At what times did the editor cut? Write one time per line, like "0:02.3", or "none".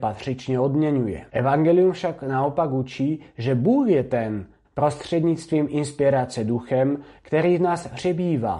0:01.3
0:04.6